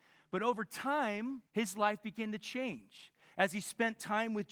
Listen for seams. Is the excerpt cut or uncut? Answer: cut